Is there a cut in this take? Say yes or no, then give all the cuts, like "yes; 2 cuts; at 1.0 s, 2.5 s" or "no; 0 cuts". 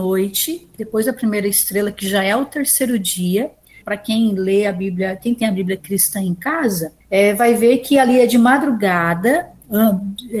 yes; 2 cuts; at 3.8 s, 7.0 s